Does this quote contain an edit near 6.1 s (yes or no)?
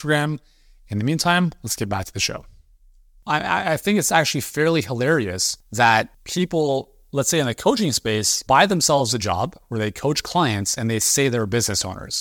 yes